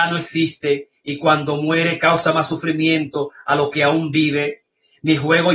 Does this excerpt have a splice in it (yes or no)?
no